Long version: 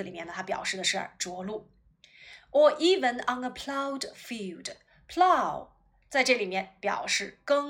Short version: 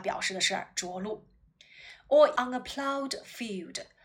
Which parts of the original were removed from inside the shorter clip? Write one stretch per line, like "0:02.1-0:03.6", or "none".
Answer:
0:02.8-0:03.3